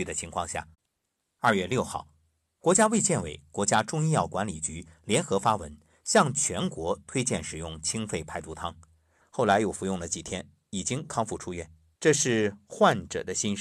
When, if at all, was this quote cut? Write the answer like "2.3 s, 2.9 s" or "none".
9.2 s, 12.0 s